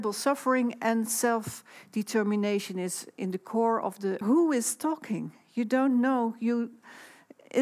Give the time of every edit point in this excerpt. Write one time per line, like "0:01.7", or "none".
0:04.2